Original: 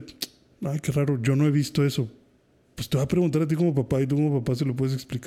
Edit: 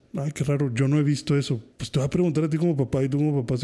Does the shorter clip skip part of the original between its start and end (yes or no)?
yes